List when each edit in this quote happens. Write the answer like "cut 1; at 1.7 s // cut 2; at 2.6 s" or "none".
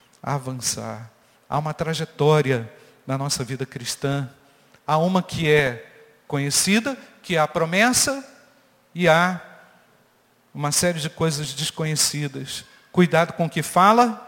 none